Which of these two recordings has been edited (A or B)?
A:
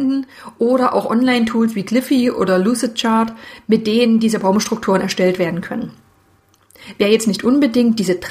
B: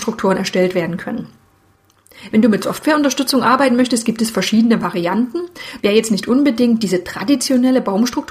B